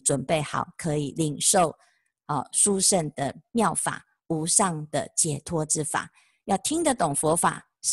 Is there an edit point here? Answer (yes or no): no